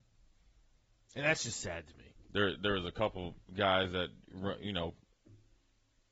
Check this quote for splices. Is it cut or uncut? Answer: cut